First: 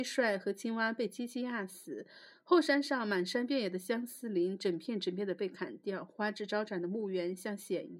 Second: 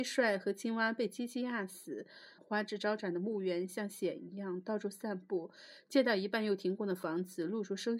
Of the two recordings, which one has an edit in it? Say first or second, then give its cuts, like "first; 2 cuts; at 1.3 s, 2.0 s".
second; 1 cut; at 2.4 s